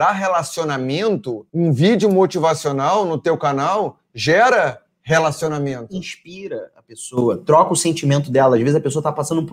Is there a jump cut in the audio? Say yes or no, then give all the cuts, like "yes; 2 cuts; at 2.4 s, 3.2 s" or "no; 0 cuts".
yes; 1 cut; at 1.5 s